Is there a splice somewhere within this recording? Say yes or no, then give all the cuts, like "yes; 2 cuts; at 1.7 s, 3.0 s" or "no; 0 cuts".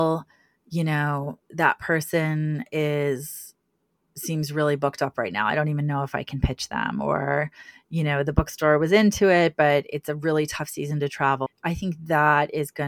yes; 1 cut; at 11.5 s